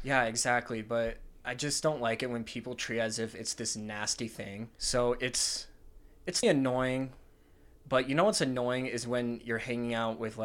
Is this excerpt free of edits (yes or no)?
no